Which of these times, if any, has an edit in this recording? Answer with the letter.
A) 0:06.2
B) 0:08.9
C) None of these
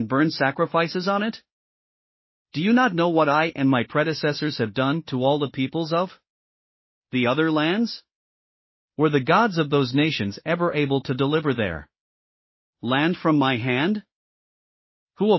C